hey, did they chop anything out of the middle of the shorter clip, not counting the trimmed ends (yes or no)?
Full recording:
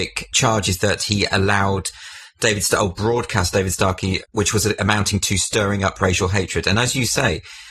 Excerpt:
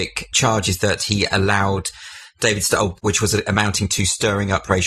yes